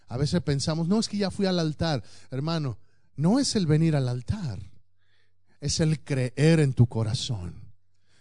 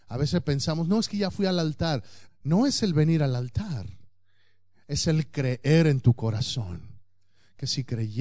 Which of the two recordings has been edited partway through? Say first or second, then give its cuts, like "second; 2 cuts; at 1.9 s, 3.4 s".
second; 1 cut; at 2.3 s